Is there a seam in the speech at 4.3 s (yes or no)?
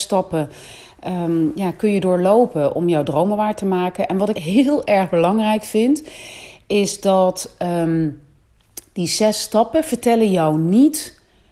yes